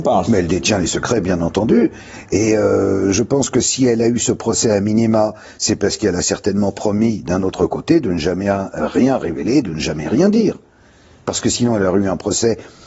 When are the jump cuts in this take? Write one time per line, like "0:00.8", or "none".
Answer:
none